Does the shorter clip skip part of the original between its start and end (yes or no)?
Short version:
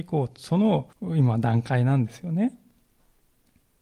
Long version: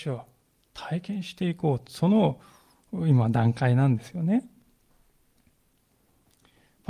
yes